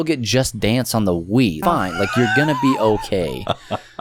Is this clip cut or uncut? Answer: cut